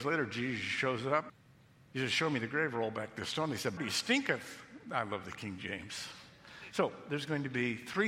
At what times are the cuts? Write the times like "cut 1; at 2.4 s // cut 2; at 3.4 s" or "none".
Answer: cut 1; at 3.8 s // cut 2; at 6.7 s